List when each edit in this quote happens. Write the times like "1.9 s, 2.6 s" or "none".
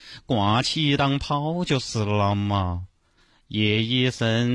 none